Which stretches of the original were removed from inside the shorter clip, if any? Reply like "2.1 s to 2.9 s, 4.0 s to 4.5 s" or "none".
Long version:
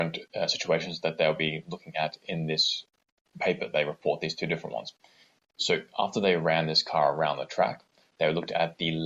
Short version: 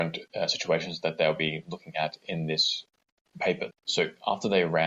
3.7 s to 5.4 s